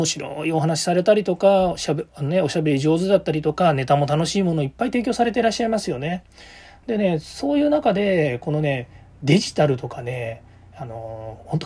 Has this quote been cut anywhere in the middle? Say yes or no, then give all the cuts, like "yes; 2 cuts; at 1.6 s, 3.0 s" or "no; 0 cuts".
no; 0 cuts